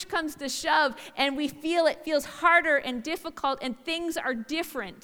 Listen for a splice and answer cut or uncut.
uncut